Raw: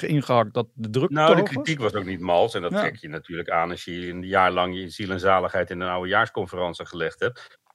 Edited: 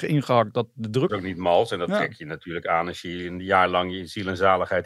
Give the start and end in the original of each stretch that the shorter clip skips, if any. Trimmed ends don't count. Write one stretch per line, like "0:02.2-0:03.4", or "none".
0:01.1-0:01.9